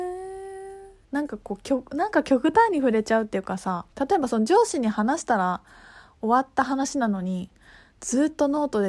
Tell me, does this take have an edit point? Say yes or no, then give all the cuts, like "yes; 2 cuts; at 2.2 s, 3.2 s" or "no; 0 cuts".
yes; 2 cuts; at 1.0 s, 3.9 s